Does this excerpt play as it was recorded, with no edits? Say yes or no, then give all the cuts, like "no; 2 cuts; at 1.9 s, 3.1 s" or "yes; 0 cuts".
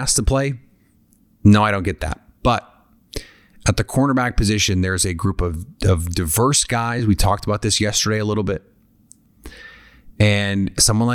yes; 0 cuts